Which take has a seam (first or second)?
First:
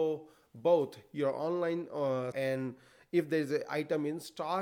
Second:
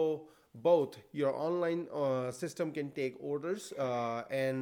first